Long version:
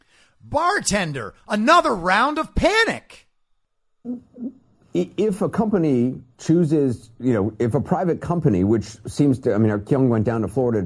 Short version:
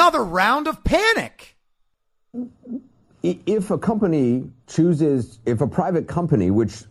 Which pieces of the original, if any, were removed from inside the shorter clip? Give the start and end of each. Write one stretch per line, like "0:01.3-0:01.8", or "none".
0:07.1-0:07.6